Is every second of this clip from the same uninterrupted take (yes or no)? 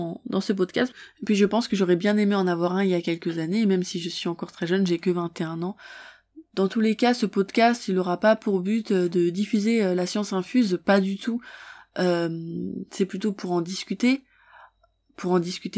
yes